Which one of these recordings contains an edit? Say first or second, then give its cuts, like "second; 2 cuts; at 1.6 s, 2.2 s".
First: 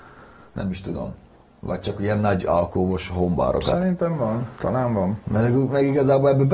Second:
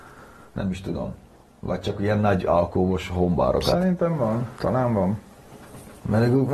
first; 1 cut; at 5.2 s